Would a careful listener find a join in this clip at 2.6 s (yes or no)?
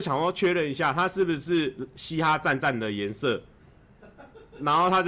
yes